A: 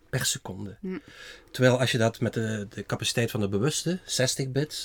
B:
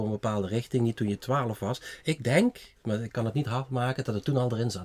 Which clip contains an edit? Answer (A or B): B